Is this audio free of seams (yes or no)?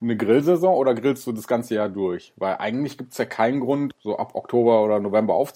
yes